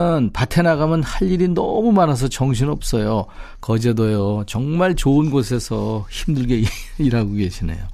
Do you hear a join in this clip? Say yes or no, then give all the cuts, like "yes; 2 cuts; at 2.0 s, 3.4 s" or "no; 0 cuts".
yes; 1 cut; at 3.6 s